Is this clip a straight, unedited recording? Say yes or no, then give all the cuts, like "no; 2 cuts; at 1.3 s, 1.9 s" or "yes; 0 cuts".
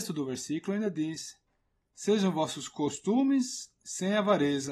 yes; 0 cuts